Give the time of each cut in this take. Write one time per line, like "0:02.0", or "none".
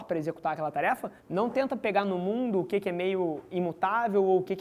0:01.2